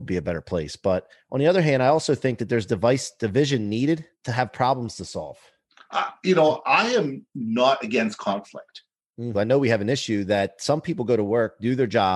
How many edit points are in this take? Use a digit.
2